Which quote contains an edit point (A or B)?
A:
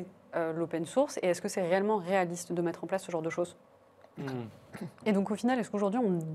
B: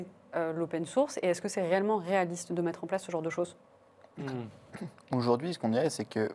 A